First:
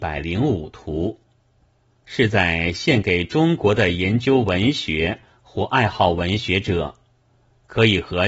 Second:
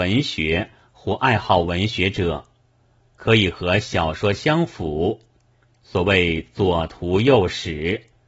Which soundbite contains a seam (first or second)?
first